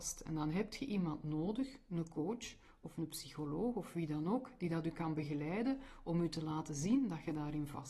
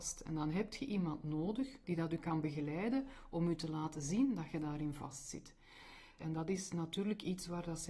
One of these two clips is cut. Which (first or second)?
second